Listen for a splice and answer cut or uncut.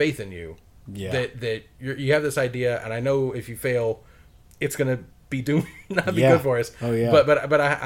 uncut